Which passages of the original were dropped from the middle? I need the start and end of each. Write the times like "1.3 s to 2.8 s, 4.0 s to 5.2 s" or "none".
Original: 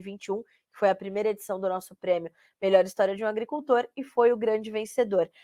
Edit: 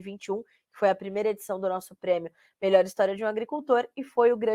none